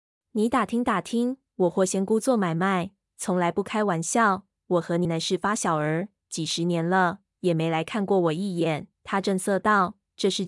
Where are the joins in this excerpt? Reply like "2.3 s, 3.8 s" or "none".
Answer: 5.0 s, 8.9 s